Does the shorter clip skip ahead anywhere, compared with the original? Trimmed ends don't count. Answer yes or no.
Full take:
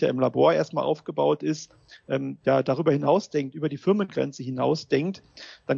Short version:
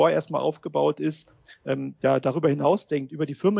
no